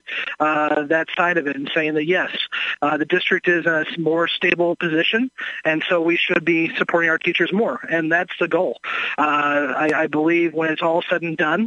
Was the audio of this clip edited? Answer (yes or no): no